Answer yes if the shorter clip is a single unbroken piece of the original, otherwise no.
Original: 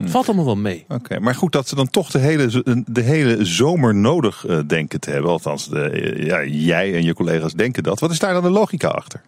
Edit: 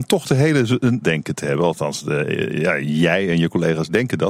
no